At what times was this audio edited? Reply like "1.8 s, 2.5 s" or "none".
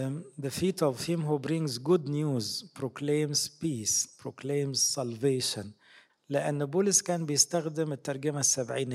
4.2 s, 6.1 s